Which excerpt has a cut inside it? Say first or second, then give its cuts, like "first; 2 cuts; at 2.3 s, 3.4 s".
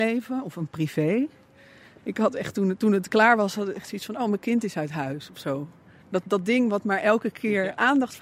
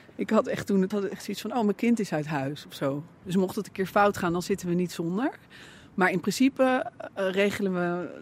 second; 2 cuts; at 0.9 s, 3.2 s